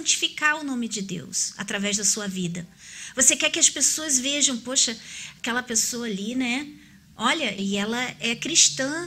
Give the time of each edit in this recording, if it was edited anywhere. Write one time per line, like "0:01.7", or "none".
0:07.6